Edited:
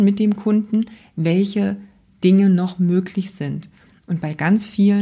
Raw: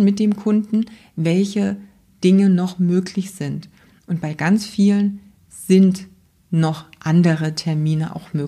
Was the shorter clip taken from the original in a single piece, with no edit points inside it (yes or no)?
yes